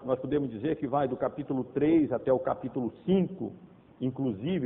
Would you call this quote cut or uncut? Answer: uncut